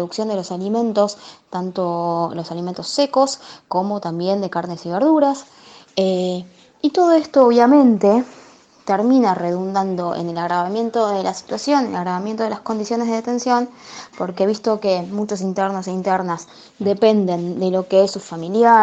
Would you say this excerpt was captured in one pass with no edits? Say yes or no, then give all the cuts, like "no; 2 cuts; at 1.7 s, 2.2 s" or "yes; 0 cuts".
yes; 0 cuts